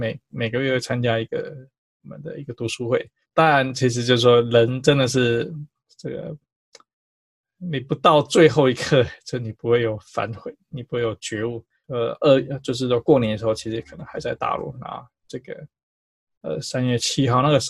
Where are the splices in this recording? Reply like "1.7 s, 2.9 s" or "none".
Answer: 3.3 s, 11.8 s